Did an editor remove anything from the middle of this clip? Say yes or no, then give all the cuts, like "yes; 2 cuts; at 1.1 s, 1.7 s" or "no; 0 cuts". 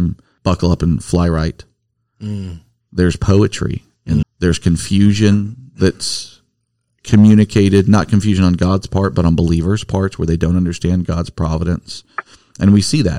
yes; 1 cut; at 4.2 s